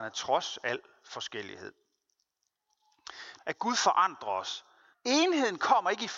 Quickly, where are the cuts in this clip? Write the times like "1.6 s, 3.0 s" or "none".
3.4 s, 4.9 s